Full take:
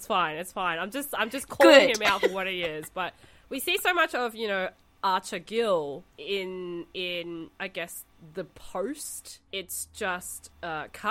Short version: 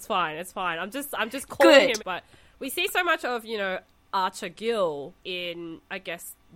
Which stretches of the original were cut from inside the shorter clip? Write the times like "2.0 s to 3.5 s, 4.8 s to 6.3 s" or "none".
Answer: 2.0 s to 2.9 s, 6.1 s to 6.9 s